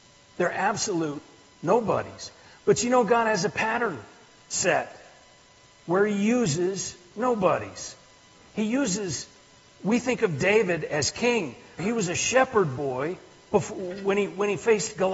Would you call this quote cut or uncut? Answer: cut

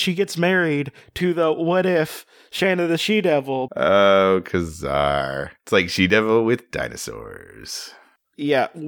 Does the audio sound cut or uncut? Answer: cut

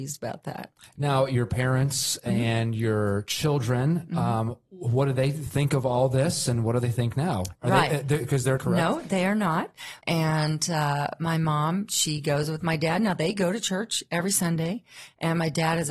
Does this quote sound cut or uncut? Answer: cut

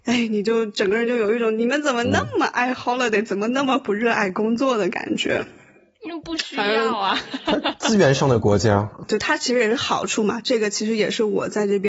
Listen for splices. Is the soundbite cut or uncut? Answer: uncut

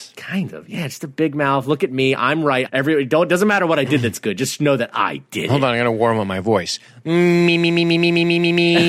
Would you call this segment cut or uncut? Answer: cut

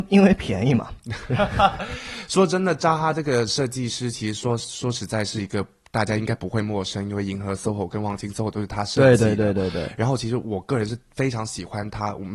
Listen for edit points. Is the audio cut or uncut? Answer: uncut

